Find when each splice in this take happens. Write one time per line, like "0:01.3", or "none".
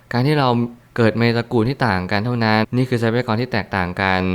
0:02.6